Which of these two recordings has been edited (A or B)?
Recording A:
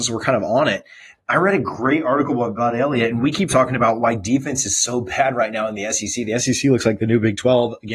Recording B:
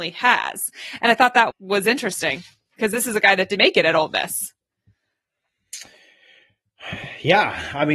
B